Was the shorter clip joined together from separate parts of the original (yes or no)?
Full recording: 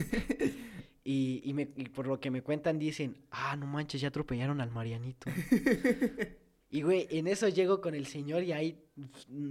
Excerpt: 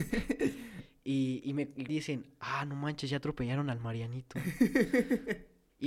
yes